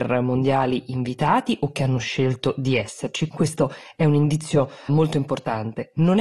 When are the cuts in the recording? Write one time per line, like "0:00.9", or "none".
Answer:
0:03.3
0:04.9